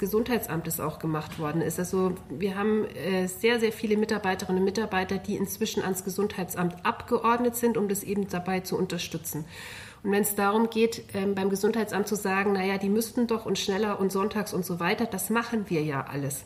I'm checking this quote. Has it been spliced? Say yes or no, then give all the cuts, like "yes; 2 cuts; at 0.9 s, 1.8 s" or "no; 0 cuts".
no; 0 cuts